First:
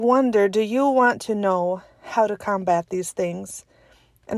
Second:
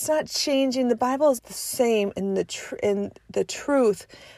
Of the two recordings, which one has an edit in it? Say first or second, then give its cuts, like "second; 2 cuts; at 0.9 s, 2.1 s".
second; 1 cut; at 1.4 s